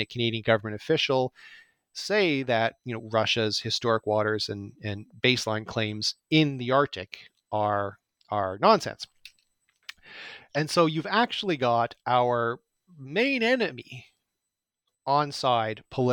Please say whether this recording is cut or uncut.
uncut